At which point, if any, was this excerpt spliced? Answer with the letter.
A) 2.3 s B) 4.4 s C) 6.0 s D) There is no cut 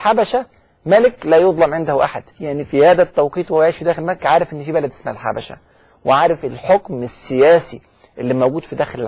A